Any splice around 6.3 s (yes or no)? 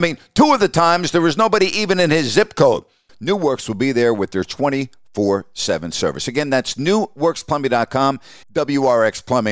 no